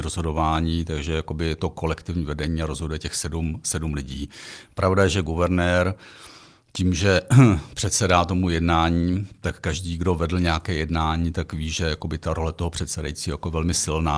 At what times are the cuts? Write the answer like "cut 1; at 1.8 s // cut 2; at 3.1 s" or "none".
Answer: none